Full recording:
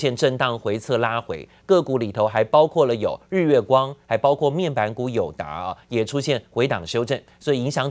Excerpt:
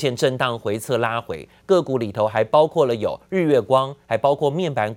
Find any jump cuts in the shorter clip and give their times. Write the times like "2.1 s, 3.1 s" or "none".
none